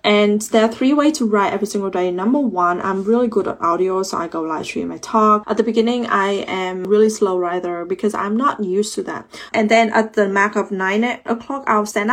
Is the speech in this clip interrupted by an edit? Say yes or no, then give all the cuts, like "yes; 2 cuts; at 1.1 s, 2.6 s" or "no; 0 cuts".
yes; 2 cuts; at 5.4 s, 9.5 s